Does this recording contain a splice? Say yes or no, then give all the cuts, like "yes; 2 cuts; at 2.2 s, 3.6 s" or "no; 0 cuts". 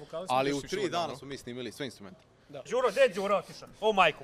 yes; 1 cut; at 2.7 s